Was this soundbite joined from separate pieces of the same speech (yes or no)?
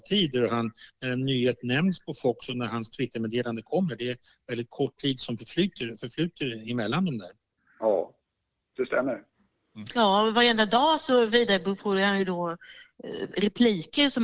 no